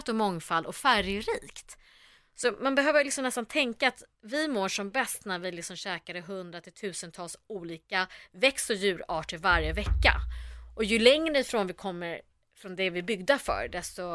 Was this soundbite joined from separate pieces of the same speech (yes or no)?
no